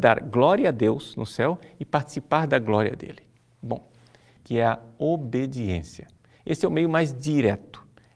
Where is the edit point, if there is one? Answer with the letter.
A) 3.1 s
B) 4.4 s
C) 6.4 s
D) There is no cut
B